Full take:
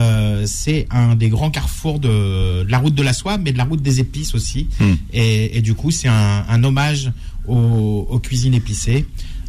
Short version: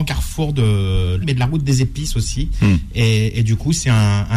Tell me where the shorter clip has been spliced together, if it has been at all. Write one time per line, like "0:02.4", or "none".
0:01.2